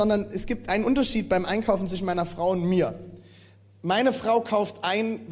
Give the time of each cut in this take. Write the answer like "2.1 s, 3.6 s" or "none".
none

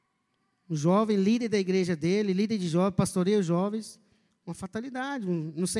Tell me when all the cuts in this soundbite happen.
none

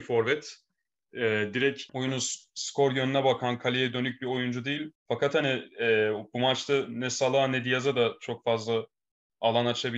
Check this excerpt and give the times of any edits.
1.9 s, 4.9 s

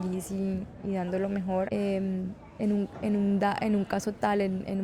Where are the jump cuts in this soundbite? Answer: 1.7 s

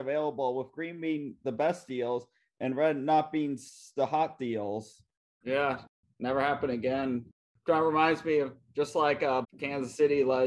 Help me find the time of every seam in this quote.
5.4 s, 9.4 s

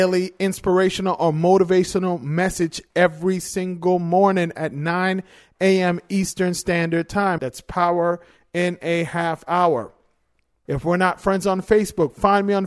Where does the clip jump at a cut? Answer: 7.4 s, 10.7 s

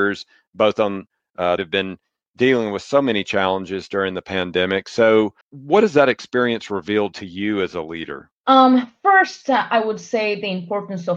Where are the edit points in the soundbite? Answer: 1.6 s, 5.4 s, 8.4 s

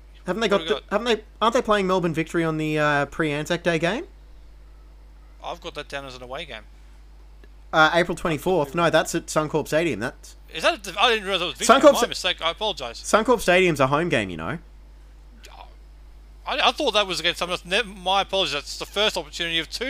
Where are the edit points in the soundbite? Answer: none

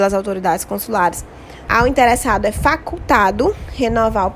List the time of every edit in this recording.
1.7 s

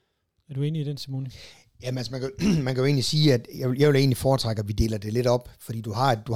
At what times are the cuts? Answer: none

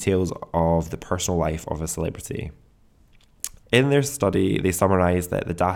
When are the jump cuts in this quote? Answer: 3.6 s

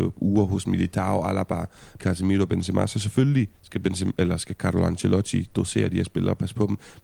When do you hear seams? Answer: 2.0 s, 3.6 s

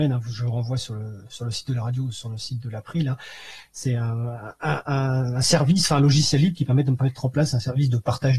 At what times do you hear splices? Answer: 4.8 s

